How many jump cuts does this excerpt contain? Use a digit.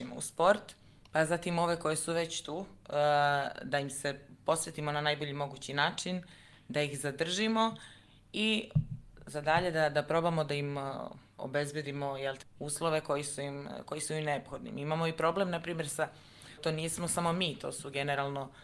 2